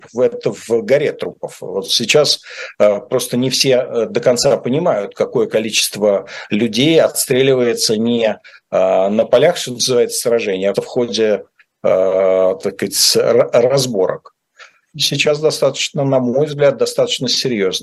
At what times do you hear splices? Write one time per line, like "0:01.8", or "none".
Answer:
0:10.7
0:14.9